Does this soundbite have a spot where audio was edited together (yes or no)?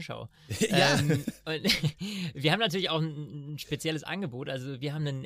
no